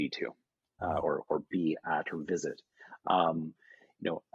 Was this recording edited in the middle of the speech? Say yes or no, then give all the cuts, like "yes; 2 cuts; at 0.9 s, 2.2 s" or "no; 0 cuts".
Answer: no; 0 cuts